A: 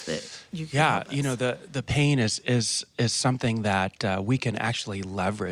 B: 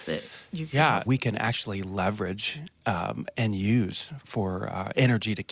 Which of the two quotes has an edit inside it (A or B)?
B